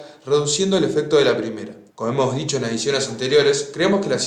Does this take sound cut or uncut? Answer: cut